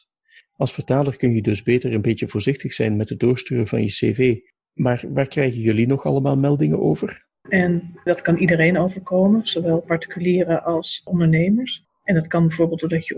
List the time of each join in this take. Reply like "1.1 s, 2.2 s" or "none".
7.4 s, 11.8 s